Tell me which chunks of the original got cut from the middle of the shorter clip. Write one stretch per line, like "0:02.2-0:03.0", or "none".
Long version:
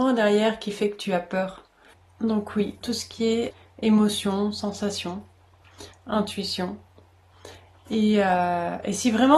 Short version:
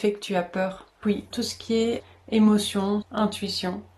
0:01.8-0:02.5
0:04.5-0:06.0